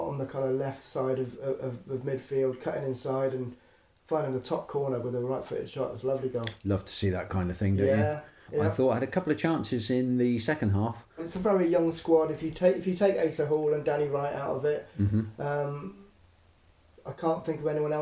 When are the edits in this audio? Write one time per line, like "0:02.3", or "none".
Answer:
0:08.5
0:11.2

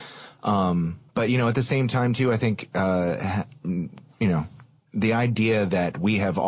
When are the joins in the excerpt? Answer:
0:01.1

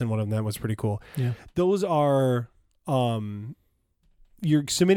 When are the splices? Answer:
none

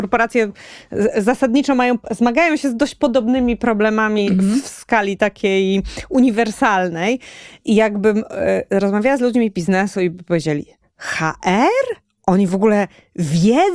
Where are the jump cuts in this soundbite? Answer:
none

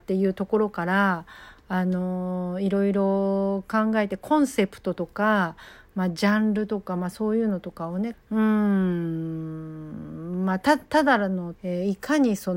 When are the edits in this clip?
0:08.1
0:11.5

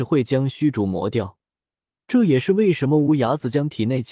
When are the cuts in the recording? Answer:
0:02.0

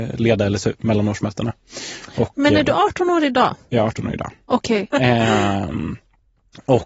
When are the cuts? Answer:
0:04.9

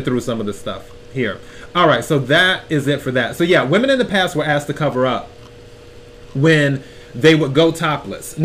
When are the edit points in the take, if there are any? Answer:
none

